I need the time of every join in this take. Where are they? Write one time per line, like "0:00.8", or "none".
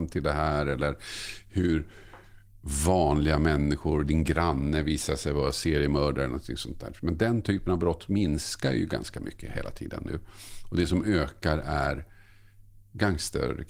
none